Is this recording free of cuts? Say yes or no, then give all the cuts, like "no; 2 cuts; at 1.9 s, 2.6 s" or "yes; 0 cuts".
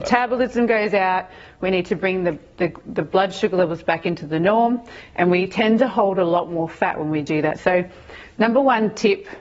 no; 1 cut; at 7.6 s